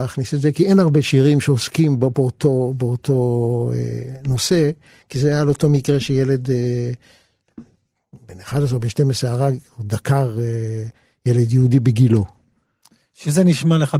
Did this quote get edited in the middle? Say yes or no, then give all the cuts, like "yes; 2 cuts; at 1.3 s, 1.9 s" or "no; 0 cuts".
no; 0 cuts